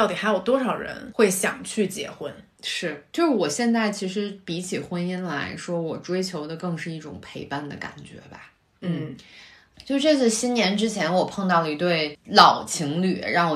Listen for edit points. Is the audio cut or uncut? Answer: uncut